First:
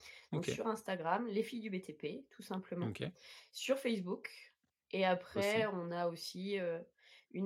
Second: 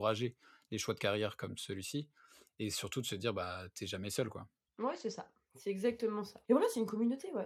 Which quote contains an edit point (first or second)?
second